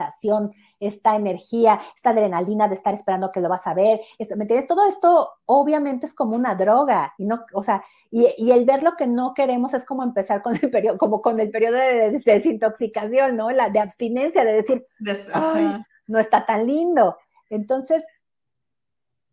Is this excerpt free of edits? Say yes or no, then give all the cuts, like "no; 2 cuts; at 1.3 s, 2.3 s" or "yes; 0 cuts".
yes; 0 cuts